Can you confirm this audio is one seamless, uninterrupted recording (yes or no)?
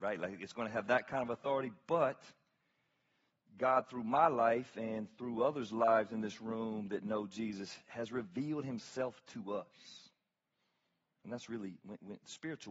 yes